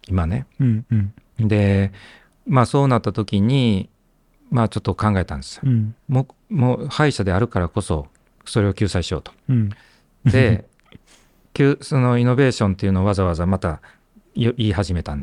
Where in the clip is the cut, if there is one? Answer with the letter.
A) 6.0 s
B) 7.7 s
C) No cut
C